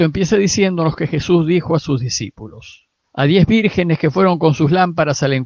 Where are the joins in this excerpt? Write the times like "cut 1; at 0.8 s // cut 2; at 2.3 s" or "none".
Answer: cut 1; at 3.0 s